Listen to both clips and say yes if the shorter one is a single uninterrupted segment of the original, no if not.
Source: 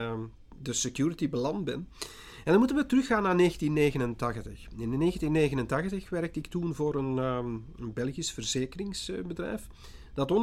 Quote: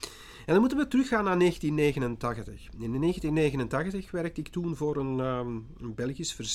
yes